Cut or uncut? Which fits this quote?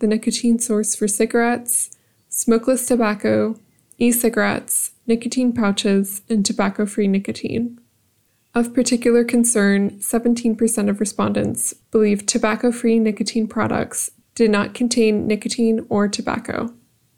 uncut